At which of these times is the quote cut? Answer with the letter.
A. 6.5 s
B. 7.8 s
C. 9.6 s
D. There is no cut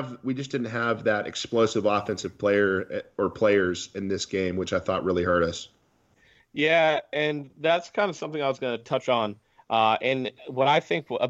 D